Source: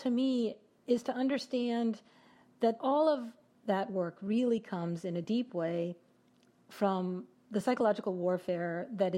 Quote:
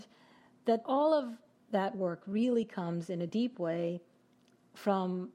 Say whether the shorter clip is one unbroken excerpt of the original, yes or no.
yes